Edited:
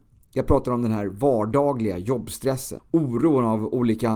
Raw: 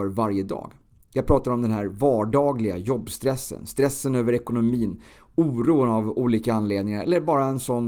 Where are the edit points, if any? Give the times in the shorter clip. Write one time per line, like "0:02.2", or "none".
0:02.8